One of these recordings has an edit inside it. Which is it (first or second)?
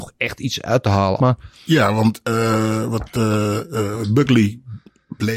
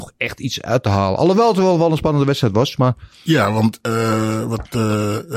first